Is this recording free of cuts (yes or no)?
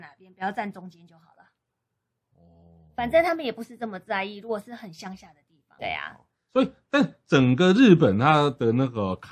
no